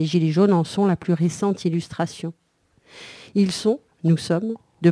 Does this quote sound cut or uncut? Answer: uncut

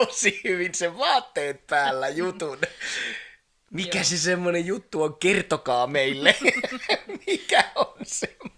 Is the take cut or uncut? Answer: uncut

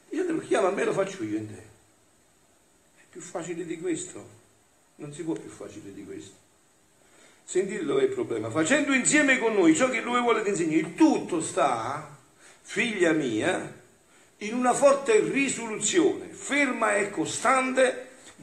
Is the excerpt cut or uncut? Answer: uncut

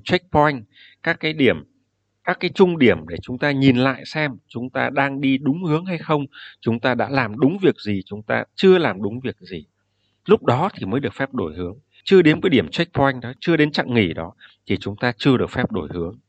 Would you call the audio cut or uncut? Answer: cut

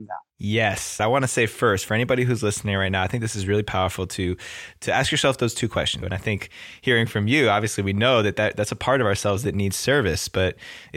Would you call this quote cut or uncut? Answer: cut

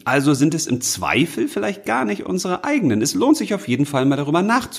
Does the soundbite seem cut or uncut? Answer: uncut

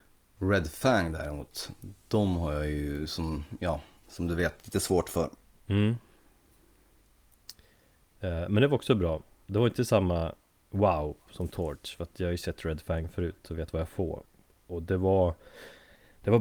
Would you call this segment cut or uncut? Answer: uncut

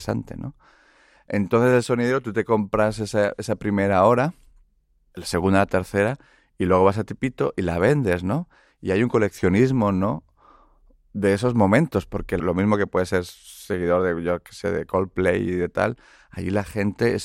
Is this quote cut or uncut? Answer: uncut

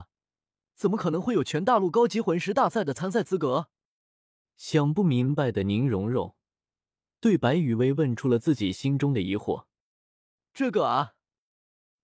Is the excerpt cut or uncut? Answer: uncut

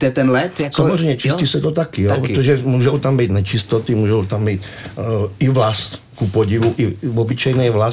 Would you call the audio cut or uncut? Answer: uncut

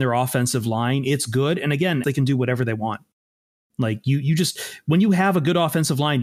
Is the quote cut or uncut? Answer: cut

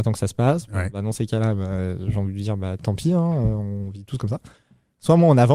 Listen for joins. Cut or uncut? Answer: uncut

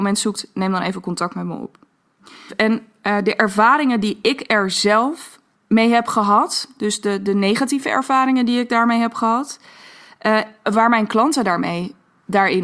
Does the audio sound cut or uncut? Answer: cut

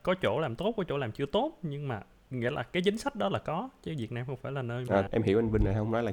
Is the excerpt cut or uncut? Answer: cut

